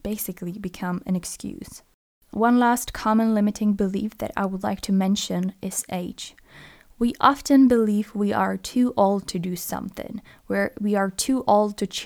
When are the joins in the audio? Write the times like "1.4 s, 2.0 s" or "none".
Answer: none